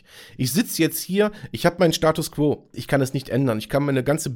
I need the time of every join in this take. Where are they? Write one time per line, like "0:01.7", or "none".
0:02.7